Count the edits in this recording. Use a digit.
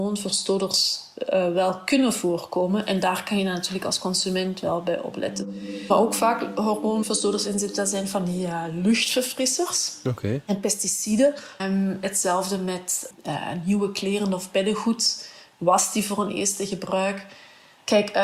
1